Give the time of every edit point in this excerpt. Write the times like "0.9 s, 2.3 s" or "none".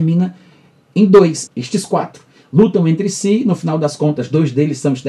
1.5 s

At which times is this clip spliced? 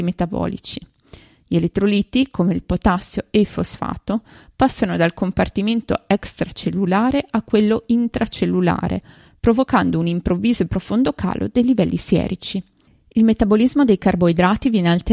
none

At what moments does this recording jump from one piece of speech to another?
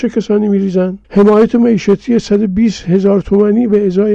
1.0 s

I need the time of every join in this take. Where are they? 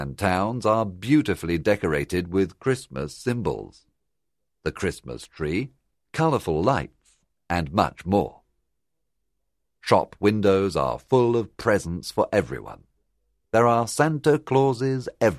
5.9 s, 13.4 s

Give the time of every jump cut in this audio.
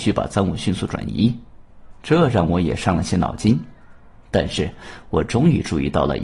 1.9 s

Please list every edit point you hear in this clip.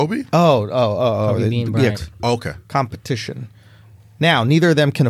1.9 s

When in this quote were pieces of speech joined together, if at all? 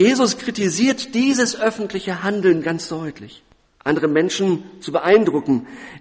3.7 s

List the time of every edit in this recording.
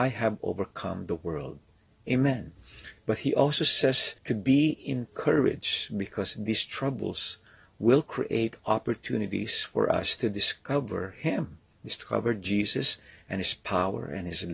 3.0 s, 4.2 s

